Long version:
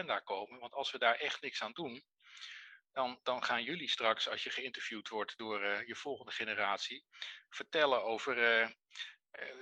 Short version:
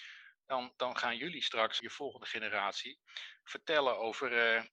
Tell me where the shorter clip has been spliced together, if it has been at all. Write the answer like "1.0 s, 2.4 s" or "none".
1.8 s